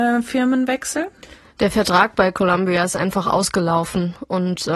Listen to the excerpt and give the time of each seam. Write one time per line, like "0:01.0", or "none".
none

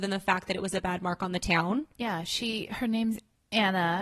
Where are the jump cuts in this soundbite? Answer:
0:02.0

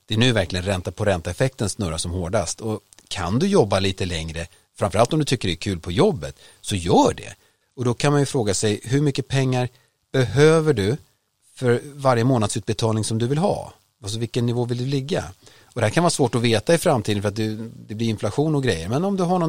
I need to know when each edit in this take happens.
0:07.6

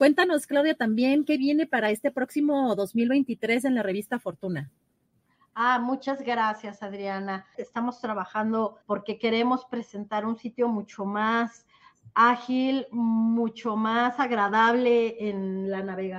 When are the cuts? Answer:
0:07.5
0:08.8

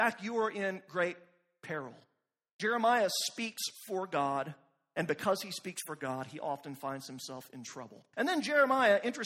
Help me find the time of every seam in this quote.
0:08.1

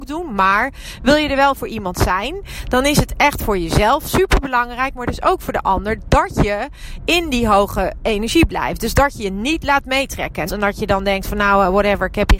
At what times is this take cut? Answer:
0:10.5

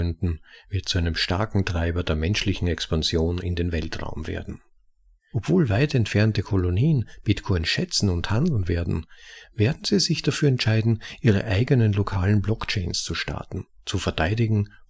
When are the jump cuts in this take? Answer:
0:05.3

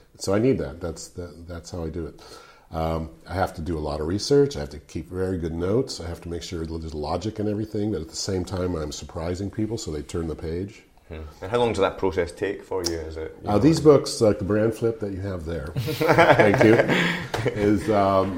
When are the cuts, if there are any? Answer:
0:15.7

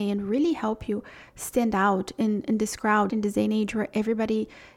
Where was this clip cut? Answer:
0:03.1

